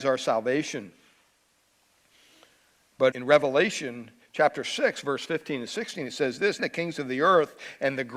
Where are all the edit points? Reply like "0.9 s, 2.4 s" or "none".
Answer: 3.1 s, 6.6 s

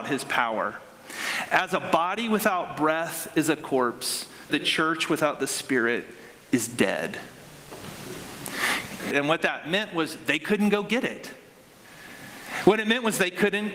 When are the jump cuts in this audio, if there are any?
4.5 s, 9.1 s

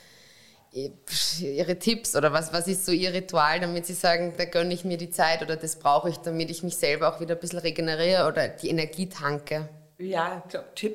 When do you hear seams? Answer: none

